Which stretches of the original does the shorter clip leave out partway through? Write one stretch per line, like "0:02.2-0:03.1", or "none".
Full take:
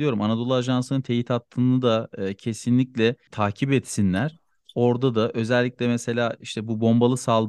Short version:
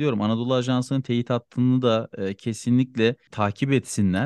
none